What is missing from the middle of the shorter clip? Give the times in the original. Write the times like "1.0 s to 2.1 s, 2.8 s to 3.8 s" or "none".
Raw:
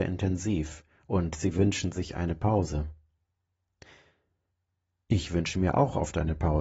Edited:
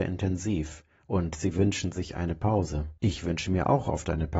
3.0 s to 5.0 s